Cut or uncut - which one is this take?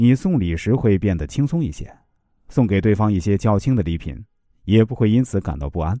uncut